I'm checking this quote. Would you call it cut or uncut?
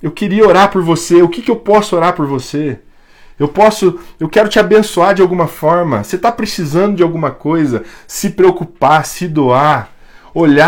uncut